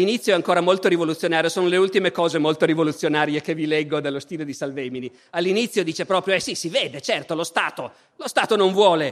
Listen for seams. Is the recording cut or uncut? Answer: cut